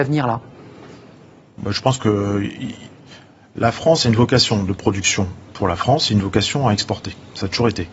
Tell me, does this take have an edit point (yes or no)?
no